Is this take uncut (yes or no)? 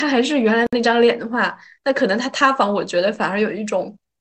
yes